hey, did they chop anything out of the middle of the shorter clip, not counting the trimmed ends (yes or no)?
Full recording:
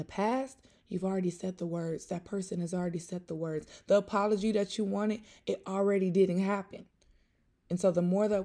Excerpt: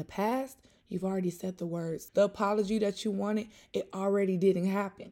yes